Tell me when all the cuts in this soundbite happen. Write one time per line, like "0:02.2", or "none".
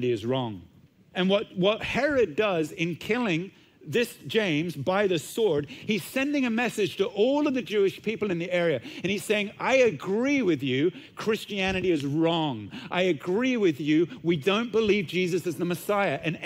0:01.1